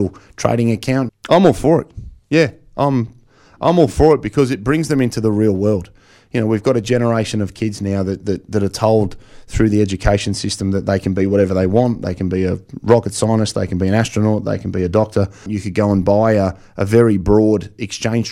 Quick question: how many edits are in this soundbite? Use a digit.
2